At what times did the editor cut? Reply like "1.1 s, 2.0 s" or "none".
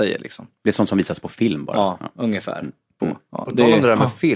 3.0 s